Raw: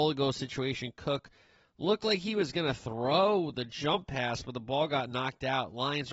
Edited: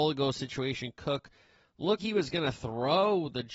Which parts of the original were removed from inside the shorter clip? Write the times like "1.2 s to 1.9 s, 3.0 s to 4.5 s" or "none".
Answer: 2.0 s to 2.2 s